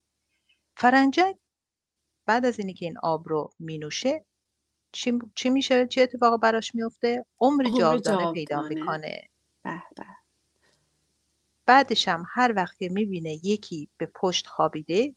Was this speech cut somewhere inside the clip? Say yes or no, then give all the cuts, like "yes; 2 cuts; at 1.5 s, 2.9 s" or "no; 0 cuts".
no; 0 cuts